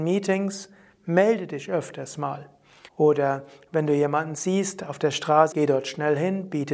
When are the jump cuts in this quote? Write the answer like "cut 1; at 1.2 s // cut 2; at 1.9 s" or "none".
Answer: cut 1; at 2.9 s // cut 2; at 5.5 s